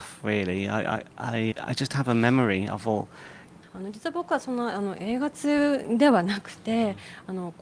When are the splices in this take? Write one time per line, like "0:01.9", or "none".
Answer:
0:01.5
0:03.6